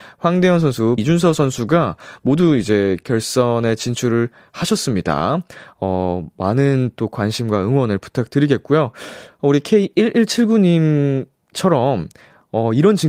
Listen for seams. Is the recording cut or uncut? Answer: cut